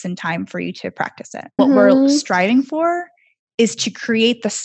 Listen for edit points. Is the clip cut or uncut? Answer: cut